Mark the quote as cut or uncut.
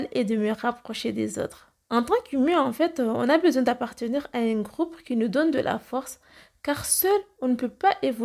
cut